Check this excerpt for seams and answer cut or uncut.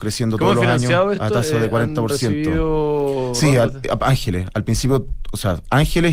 uncut